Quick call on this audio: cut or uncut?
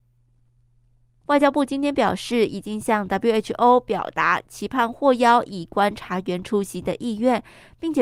cut